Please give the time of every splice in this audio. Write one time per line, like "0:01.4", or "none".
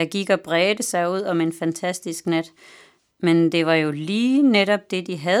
none